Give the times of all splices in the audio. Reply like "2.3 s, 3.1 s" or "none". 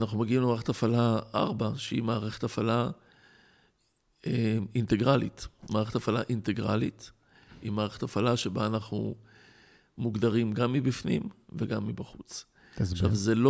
5.6 s